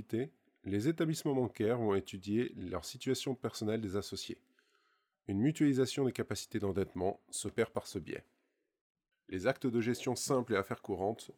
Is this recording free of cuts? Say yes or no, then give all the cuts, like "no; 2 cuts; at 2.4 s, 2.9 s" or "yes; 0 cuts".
no; 1 cut; at 9.1 s